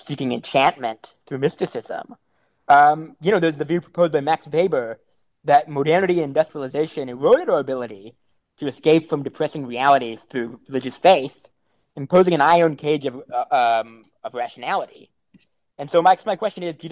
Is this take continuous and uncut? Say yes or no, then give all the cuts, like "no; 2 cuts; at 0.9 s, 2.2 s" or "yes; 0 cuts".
yes; 0 cuts